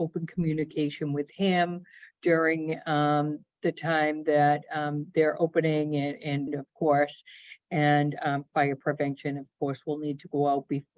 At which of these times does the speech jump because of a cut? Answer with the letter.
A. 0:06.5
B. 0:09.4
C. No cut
A